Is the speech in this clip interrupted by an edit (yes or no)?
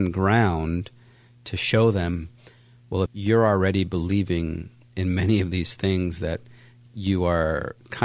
yes